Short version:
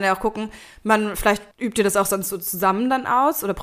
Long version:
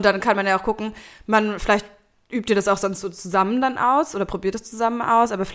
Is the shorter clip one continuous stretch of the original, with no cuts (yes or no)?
no